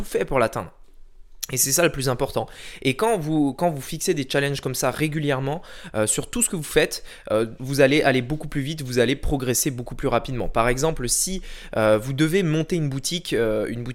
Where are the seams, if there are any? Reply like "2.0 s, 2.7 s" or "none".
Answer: 7.6 s